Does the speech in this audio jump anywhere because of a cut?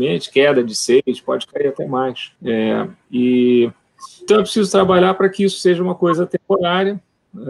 yes; 2 cuts; at 2.4 s, 4.3 s

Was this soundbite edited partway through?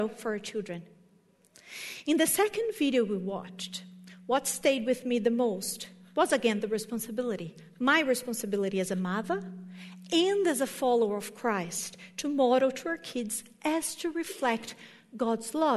no; 0 cuts

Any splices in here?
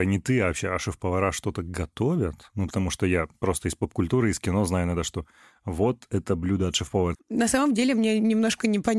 yes; 2 cuts; at 2.7 s, 7.1 s

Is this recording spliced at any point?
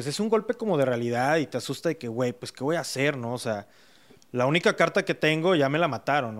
no; 0 cuts

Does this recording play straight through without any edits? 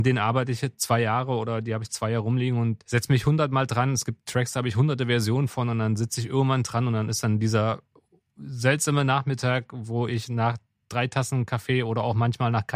yes; 0 cuts

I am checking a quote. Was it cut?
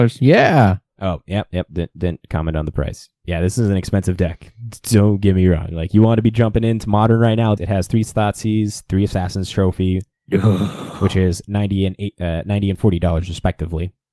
yes; 1 cut; at 7.6 s

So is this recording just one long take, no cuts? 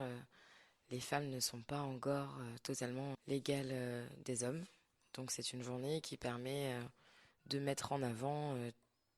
no; 1 cut; at 3.1 s

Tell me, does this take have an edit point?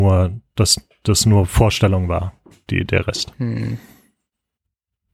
no; 0 cuts

